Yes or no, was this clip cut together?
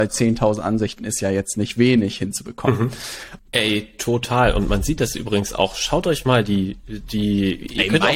yes